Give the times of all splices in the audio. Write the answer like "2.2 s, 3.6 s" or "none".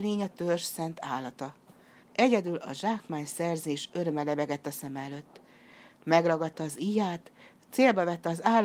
2.0 s